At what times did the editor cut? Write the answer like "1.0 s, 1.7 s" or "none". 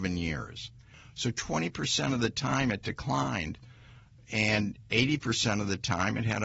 none